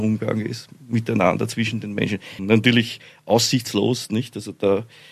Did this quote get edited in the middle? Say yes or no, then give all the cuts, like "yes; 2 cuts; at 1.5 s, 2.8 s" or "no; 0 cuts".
yes; 1 cut; at 2.4 s